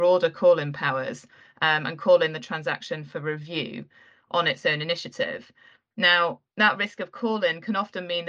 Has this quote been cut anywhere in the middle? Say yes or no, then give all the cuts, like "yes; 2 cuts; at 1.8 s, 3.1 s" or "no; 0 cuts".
no; 0 cuts